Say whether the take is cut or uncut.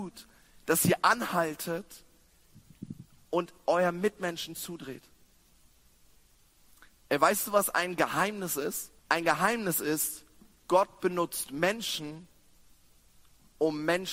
cut